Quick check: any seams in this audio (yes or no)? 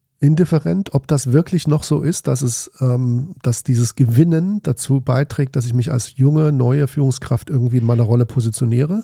no